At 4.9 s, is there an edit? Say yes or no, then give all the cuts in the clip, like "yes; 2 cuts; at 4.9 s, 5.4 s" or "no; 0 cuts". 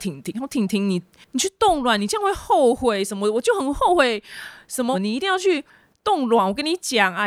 yes; 1 cut; at 4.9 s